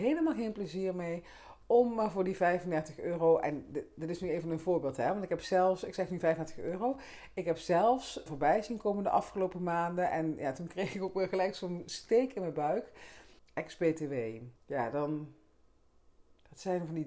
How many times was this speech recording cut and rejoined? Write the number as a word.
three